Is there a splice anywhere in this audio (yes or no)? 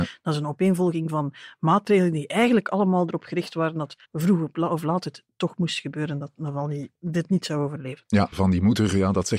yes